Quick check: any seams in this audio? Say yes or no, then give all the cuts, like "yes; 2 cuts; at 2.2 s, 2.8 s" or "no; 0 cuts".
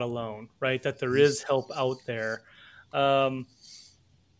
no; 0 cuts